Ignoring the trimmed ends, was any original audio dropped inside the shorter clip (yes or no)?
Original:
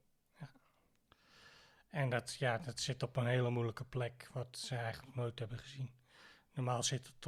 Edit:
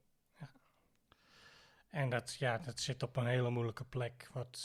no